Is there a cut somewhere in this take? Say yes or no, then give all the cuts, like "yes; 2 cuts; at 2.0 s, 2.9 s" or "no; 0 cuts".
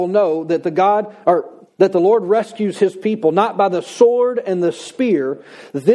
no; 0 cuts